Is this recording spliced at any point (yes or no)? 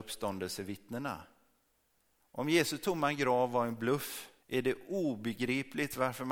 yes